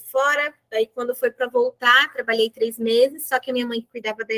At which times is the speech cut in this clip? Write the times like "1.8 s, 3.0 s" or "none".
none

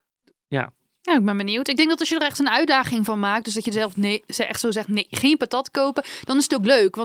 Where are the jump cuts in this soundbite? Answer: none

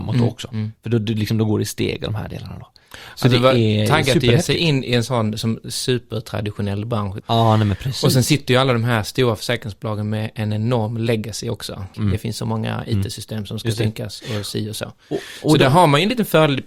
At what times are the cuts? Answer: 7.2 s, 11.9 s

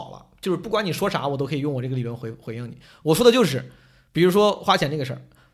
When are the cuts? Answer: none

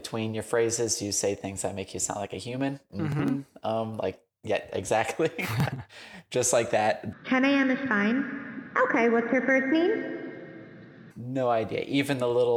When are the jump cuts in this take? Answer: 7.1 s, 11.1 s

